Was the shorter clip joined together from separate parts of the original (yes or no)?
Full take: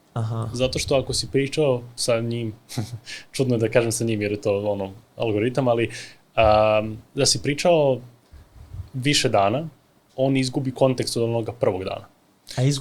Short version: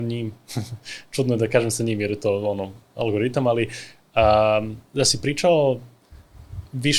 no